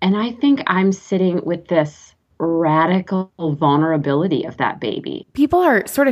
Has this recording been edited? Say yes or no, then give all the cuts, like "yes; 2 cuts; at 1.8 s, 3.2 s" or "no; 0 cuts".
yes; 1 cut; at 5.2 s